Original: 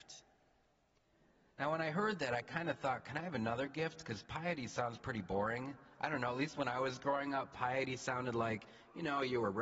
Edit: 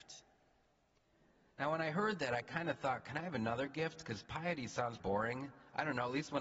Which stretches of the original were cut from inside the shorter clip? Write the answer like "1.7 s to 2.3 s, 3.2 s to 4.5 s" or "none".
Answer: 5.0 s to 5.2 s